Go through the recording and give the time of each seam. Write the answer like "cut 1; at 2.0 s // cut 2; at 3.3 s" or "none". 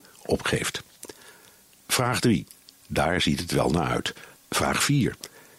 cut 1; at 2.7 s // cut 2; at 4.4 s